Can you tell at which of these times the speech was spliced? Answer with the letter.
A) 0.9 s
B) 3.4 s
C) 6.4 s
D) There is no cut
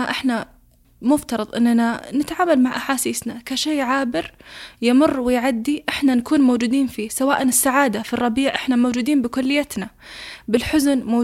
D